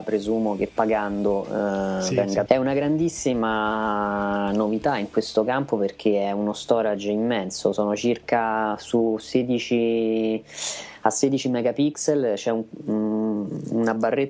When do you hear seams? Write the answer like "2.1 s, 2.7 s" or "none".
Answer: 2.5 s